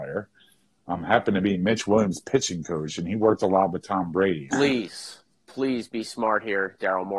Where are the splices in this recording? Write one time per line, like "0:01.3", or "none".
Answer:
0:04.5